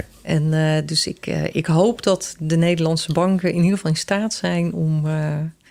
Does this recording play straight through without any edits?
yes; 0 cuts

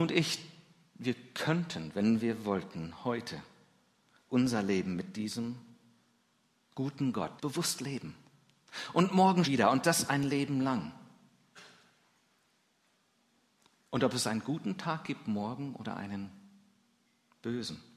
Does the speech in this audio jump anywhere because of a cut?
yes; 2 cuts; at 7.4 s, 9.4 s

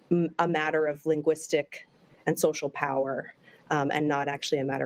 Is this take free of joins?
yes; 0 cuts

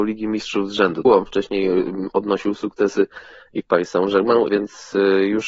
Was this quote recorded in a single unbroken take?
no; 2 cuts; at 1.0 s, 4.5 s

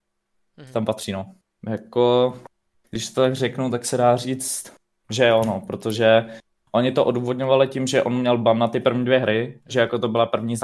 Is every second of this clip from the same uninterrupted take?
no; 1 cut; at 1.6 s

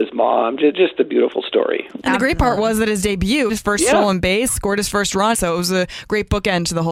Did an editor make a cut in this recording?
yes; 2 cuts; at 3.5 s, 5.3 s

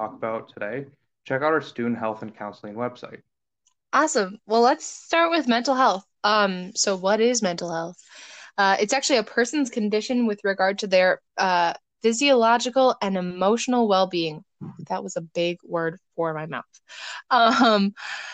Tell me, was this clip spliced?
no; 0 cuts

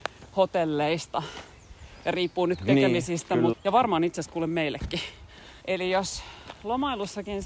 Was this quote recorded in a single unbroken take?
no; 2 cuts; at 3.5 s, 5.6 s

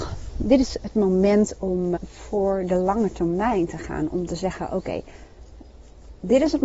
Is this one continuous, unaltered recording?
no; 1 cut; at 2.0 s

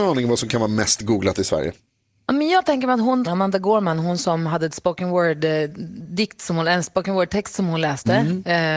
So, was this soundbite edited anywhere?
yes; 1 cut; at 3.3 s

